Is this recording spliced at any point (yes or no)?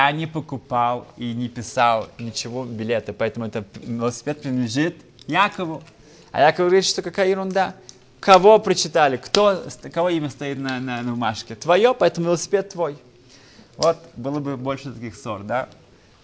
no